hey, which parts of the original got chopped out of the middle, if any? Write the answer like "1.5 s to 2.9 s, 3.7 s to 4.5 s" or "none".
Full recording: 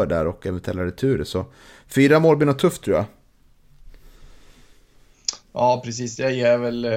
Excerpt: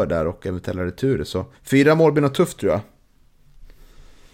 1.5 s to 1.8 s